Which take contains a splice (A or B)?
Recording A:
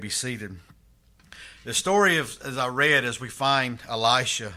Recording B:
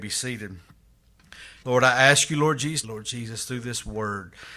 B